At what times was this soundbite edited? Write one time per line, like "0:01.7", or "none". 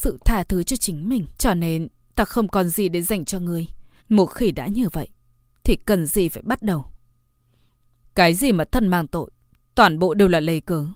0:01.4
0:04.0
0:08.0